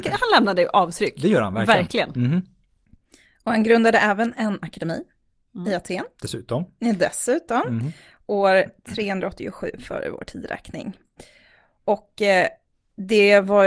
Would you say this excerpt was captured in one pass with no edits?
yes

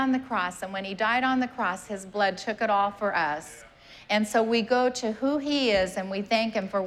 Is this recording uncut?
yes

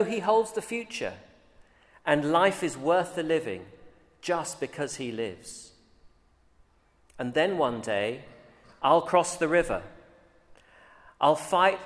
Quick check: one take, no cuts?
yes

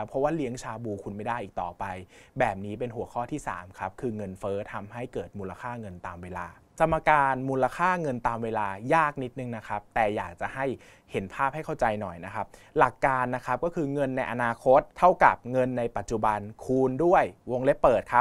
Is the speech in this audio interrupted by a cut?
yes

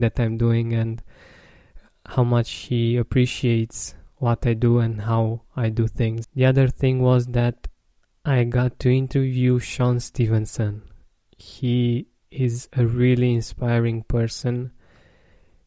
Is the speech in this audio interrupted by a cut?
yes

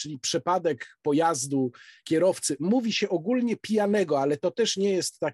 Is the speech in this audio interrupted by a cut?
no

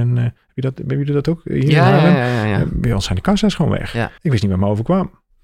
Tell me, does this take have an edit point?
yes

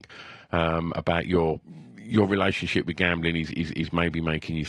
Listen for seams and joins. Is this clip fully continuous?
yes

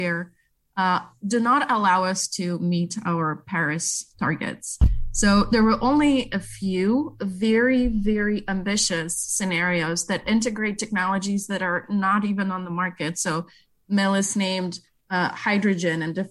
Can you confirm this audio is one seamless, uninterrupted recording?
yes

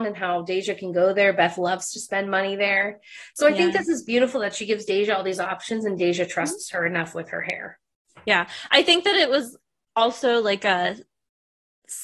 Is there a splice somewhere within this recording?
no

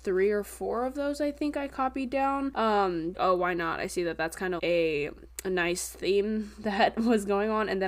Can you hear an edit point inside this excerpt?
yes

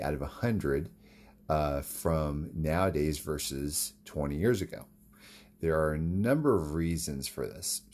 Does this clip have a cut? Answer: no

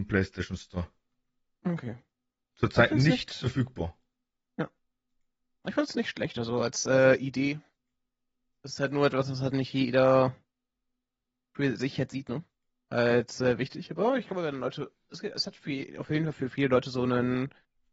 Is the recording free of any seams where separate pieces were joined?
yes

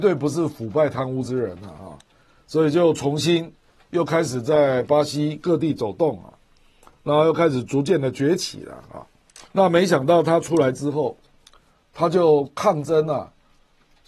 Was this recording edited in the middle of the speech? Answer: yes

